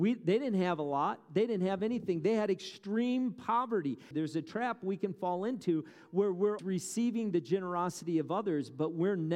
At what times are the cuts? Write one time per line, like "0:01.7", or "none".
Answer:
0:04.1
0:06.6

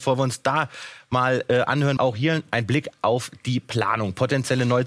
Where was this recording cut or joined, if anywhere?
0:02.0

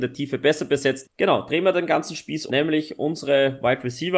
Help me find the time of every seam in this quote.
0:01.0
0:02.5

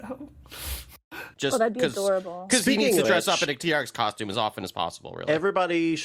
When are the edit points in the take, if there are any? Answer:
0:01.3
0:03.0

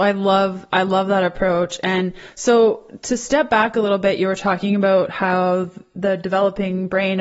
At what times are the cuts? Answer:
none

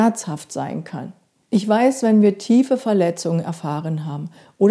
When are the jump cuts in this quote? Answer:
0:01.4

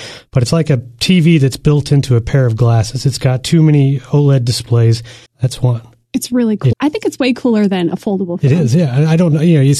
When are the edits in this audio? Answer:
0:05.3
0:06.7

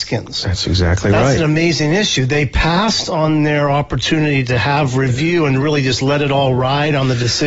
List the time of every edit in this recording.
none

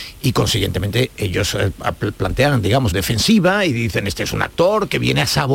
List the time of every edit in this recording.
0:02.9

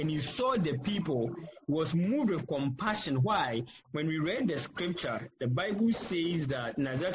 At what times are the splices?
0:03.8

